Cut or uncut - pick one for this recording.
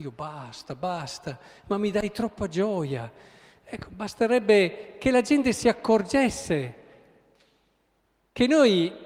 uncut